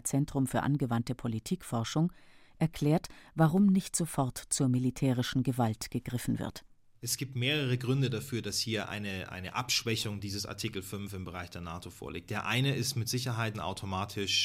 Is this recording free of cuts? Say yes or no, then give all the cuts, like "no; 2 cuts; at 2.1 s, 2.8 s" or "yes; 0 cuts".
no; 1 cut; at 13.5 s